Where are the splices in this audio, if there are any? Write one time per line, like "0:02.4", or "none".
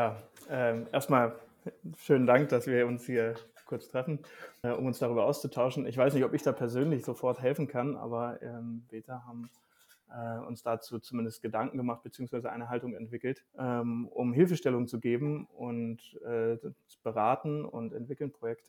0:04.6
0:08.9
0:13.5